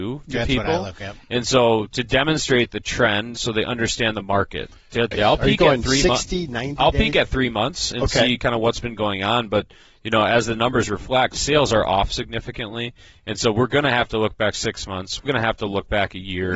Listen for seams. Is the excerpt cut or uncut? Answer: cut